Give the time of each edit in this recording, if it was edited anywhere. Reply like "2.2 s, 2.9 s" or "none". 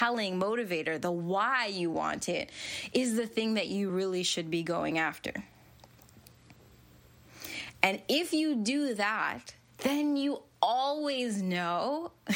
none